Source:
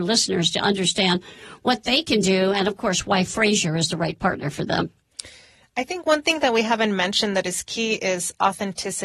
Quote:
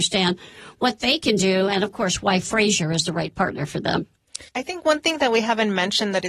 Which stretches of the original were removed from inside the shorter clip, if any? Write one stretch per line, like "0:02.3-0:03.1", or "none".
0:05.3-0:05.7